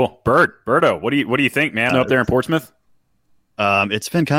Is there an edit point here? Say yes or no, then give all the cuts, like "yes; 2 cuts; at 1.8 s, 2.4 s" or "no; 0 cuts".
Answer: yes; 1 cut; at 1.9 s